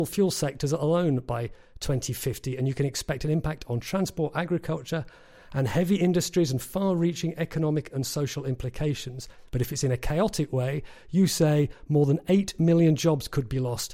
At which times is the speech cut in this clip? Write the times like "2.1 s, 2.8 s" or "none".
9.5 s